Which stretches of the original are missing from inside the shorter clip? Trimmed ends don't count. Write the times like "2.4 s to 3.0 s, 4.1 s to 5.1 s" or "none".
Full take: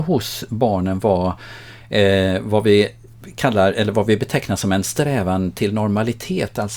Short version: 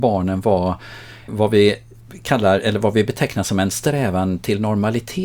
1.9 s to 2.4 s